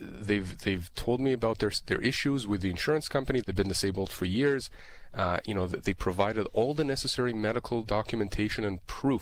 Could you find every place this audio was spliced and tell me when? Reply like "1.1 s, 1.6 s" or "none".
3.4 s